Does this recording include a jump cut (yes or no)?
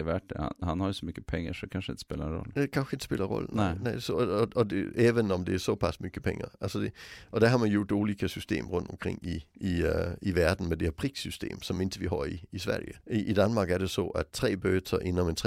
yes